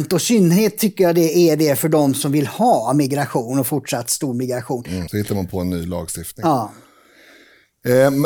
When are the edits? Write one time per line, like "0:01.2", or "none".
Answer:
0:05.1